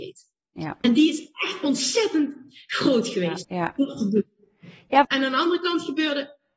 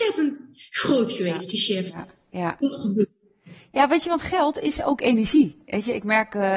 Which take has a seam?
first; 2 cuts; at 3.4 s, 5.0 s

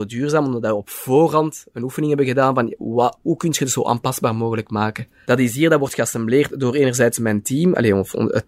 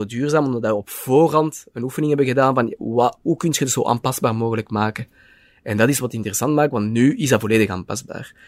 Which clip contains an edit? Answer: first; 1 cut; at 5.2 s

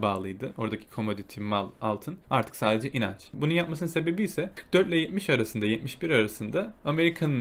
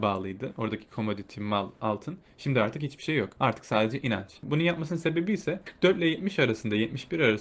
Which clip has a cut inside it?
first; 1 cut; at 2.2 s

